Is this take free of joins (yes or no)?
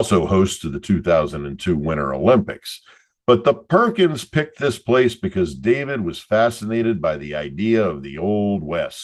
yes